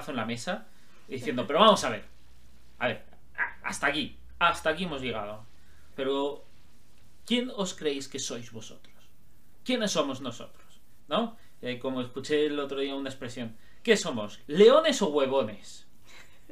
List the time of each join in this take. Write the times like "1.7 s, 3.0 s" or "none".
5.9 s